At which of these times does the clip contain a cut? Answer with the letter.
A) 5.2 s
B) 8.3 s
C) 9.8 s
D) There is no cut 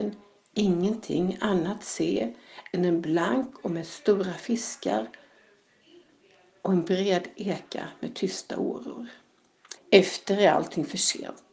C